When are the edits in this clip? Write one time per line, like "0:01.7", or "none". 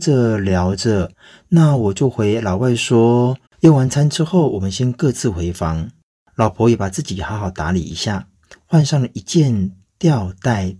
0:01.1
0:03.5